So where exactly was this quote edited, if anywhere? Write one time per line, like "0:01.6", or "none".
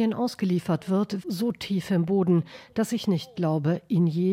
0:01.2